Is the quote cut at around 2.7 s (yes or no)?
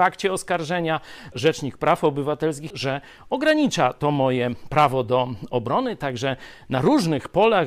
yes